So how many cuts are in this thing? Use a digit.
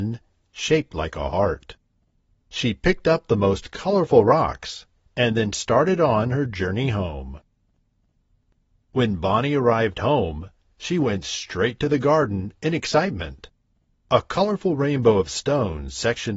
2